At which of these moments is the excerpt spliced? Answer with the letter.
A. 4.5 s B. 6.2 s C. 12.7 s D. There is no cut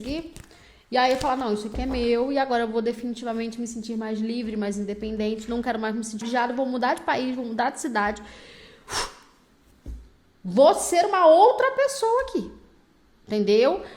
B